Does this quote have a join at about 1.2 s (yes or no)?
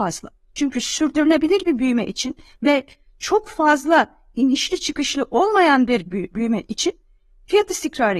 no